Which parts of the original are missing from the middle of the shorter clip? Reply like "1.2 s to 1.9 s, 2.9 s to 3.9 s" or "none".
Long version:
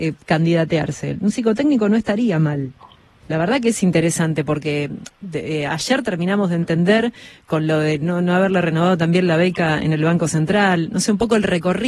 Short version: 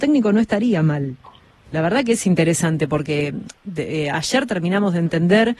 none